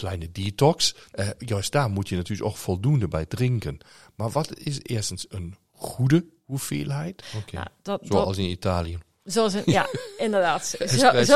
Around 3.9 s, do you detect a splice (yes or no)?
no